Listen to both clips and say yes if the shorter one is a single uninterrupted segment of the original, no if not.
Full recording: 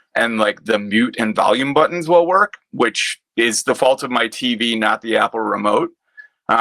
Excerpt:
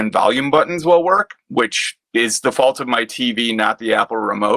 yes